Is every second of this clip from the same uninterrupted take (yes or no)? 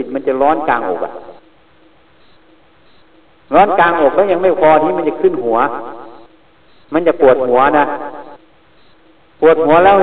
yes